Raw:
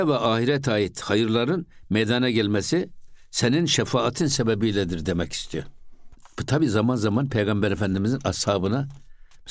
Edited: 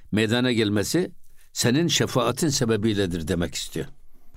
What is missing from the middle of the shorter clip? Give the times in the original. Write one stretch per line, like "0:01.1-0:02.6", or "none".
none